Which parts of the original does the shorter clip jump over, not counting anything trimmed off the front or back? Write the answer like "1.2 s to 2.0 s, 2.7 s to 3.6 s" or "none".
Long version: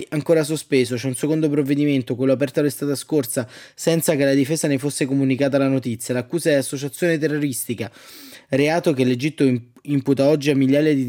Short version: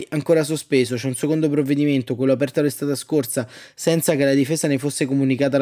none

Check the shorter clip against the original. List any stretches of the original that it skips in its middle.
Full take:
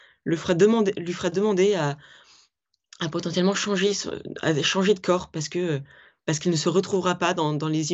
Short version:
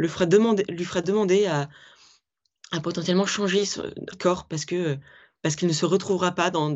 4.4 s to 5.0 s

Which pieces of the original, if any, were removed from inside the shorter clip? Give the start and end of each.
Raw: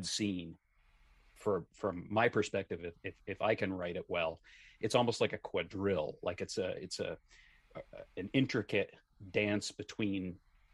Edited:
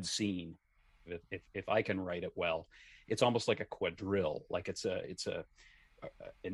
1.1 s to 2.8 s

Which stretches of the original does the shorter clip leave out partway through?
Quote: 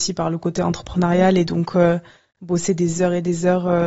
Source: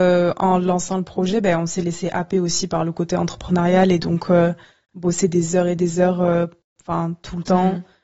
none

